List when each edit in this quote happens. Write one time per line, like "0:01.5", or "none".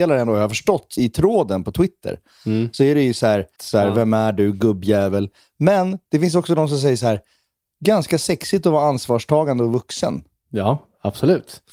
0:01.0
0:03.6